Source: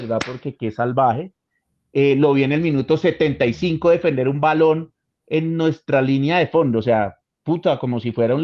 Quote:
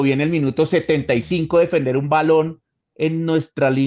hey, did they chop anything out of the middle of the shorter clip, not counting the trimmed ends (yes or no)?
no